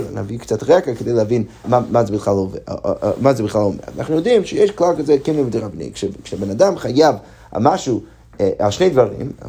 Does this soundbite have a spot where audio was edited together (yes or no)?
yes